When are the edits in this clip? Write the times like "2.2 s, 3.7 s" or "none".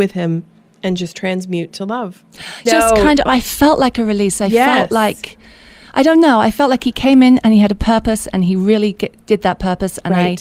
2.7 s

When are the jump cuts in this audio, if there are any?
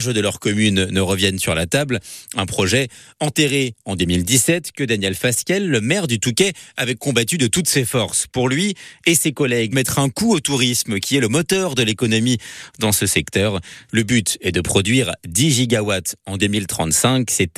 9.7 s, 13.9 s

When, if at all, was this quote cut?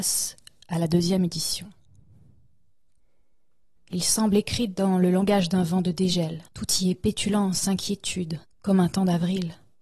3.8 s, 6.5 s, 8.4 s

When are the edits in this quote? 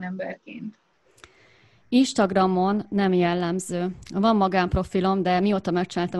none

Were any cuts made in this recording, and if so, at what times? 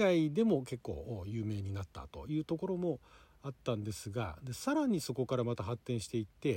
none

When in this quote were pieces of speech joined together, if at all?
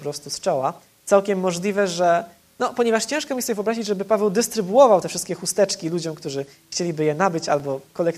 none

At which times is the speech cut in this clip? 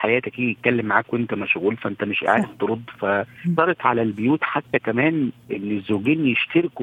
3.4 s

